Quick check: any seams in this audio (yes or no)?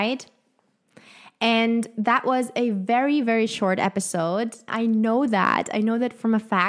yes